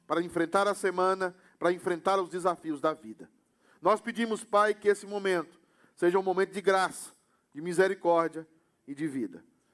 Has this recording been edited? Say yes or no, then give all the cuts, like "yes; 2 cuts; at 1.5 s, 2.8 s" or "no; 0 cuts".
no; 0 cuts